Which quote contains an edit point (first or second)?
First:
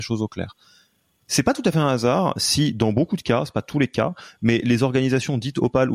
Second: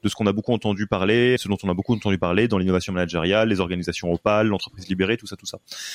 second